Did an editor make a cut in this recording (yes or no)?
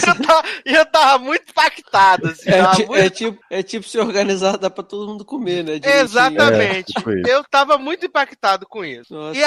no